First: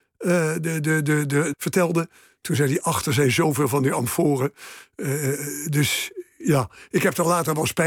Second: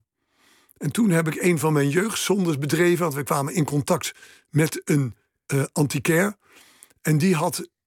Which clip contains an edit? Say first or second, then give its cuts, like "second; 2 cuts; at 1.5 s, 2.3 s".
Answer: first; 1 cut; at 1.5 s